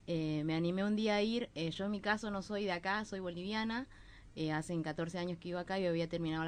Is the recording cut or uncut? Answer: uncut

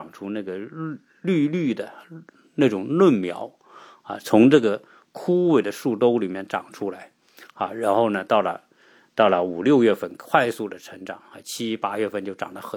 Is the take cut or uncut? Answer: uncut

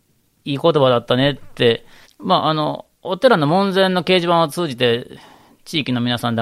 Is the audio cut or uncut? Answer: cut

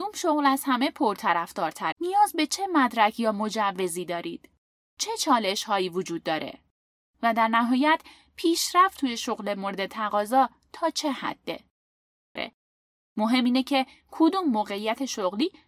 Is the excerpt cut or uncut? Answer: cut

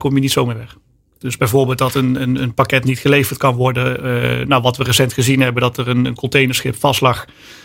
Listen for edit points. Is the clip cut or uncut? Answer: cut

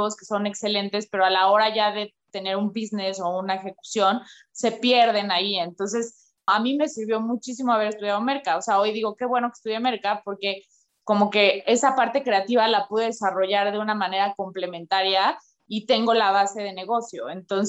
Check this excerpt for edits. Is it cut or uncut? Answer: cut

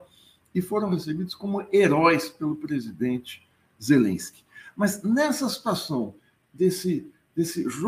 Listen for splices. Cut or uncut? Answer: uncut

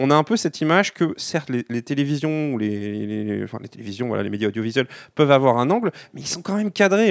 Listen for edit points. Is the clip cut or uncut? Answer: uncut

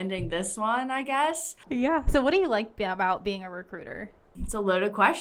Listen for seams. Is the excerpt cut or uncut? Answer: uncut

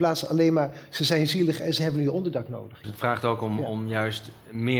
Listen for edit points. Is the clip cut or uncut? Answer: cut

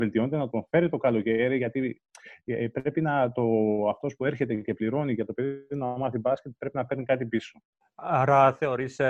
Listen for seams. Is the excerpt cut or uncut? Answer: cut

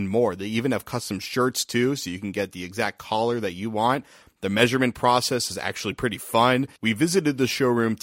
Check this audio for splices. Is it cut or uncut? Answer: cut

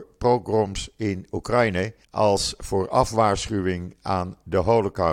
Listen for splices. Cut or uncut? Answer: cut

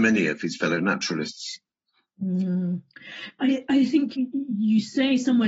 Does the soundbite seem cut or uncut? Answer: cut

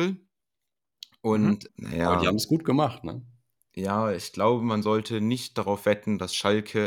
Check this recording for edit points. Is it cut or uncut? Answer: cut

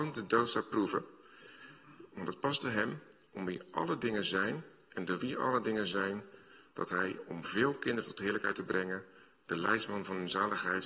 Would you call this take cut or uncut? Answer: uncut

